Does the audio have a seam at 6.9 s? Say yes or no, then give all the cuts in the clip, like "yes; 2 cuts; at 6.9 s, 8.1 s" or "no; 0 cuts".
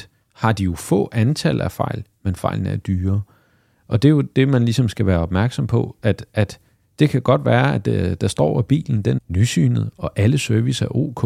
no; 1 cut; at 9.2 s